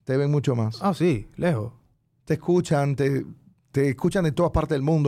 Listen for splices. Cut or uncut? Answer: uncut